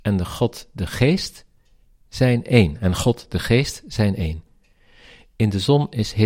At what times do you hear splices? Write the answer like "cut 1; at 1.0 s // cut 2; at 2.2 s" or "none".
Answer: none